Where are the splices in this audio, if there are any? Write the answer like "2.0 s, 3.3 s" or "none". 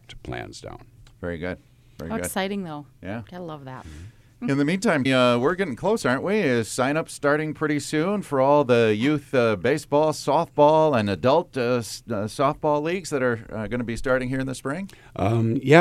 5.1 s